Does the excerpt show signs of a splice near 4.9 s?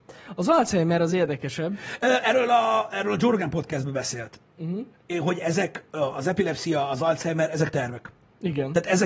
yes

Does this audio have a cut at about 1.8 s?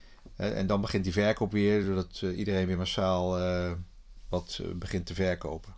no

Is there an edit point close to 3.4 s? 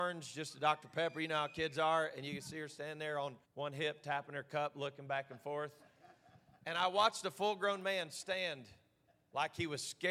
yes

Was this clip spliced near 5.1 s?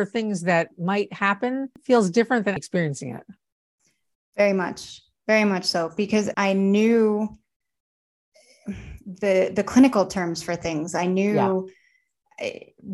no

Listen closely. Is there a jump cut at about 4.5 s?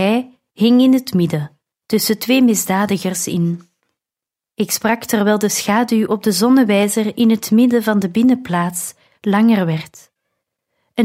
yes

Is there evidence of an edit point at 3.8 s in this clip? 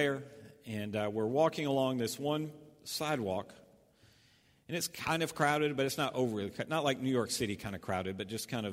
no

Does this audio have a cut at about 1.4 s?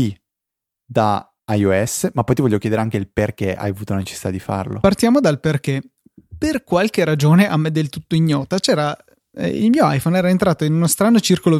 yes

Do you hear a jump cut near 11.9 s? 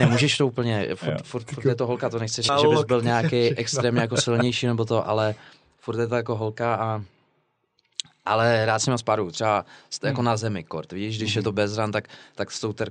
no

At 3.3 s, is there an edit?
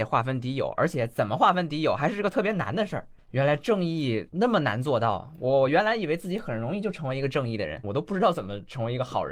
yes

